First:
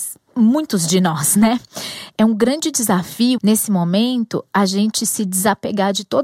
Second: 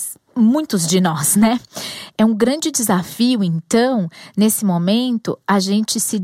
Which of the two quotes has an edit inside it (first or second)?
first